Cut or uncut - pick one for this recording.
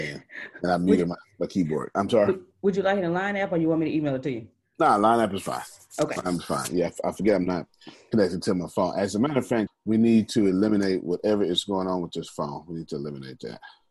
cut